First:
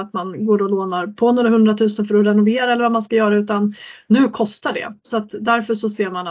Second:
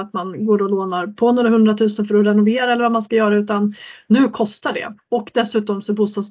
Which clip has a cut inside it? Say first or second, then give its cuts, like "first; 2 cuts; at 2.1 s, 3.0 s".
second; 1 cut; at 5.0 s